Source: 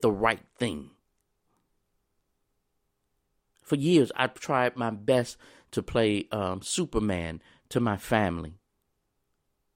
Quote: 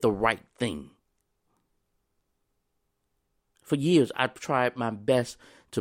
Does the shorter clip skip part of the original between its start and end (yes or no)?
no